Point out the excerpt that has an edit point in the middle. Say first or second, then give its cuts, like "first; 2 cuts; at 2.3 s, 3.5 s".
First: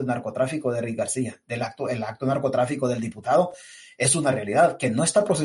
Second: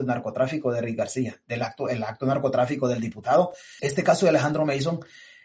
second; 1 cut; at 3.8 s